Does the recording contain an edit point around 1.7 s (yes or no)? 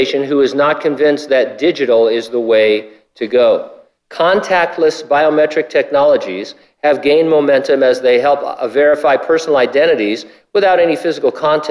no